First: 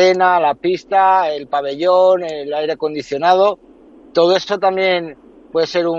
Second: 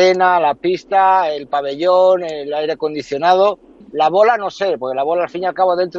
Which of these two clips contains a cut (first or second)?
second